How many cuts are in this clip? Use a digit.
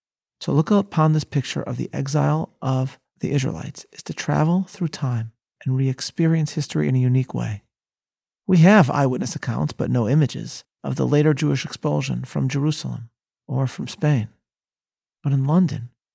0